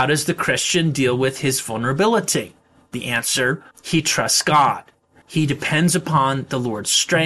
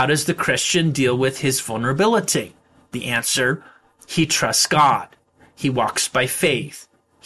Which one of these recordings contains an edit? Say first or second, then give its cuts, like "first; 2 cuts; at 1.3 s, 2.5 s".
first; 2 cuts; at 3.7 s, 5.2 s